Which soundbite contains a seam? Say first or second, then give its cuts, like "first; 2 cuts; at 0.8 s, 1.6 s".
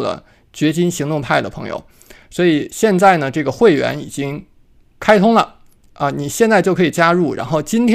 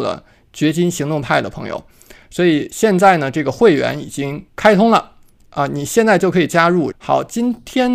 second; 2 cuts; at 4.5 s, 6.9 s